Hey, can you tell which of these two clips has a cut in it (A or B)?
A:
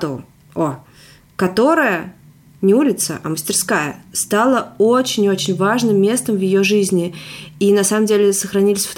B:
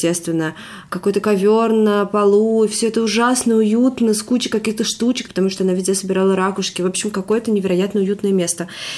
B